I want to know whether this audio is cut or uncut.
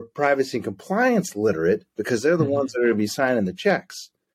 uncut